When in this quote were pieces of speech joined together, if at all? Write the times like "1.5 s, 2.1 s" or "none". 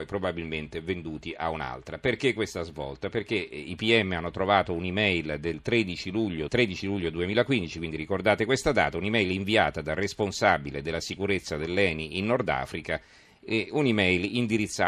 6.5 s